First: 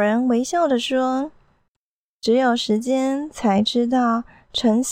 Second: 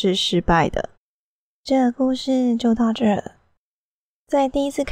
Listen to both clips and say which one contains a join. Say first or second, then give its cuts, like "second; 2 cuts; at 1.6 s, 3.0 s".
second; 1 cut; at 0.9 s